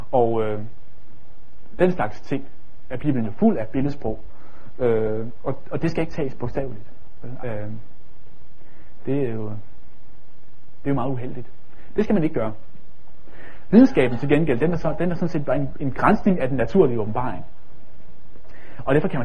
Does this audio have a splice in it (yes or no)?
yes